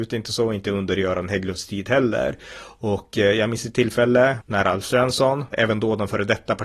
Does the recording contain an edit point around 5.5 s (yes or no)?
yes